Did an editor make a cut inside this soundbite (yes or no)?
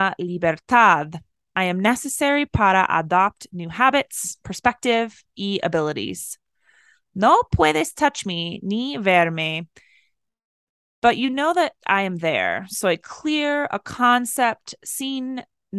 no